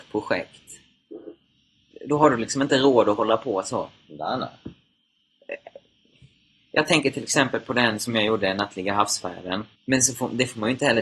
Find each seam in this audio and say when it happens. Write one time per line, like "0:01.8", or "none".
0:01.9
0:09.7